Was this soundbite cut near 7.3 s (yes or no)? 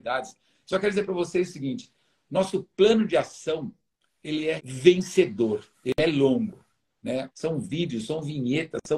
yes